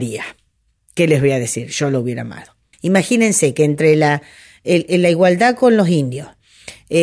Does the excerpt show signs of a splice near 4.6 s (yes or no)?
no